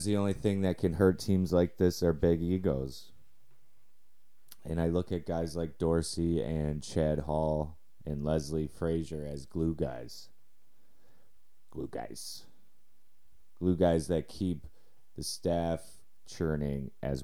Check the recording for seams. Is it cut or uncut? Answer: cut